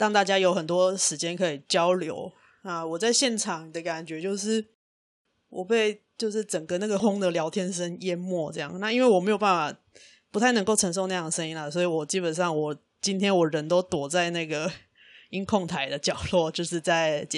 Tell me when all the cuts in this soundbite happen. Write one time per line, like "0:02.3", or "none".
0:07.0